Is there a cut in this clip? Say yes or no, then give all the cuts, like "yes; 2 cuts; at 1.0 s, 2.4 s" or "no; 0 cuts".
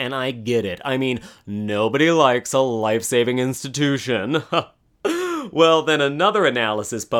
no; 0 cuts